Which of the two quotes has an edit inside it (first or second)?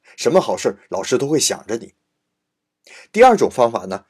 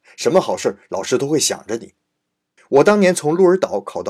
second